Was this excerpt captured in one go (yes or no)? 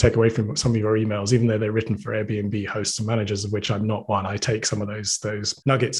yes